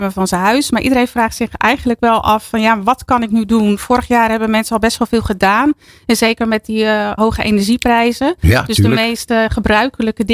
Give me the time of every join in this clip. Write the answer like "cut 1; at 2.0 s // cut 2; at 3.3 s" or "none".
cut 1; at 7.2 s